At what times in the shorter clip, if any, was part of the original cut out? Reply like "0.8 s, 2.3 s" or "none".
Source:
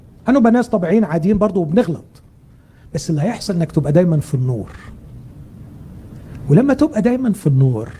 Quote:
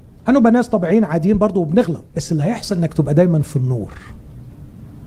2.1 s